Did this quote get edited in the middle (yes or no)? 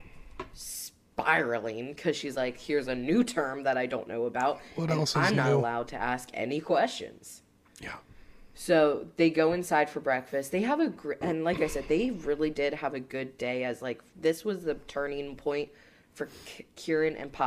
no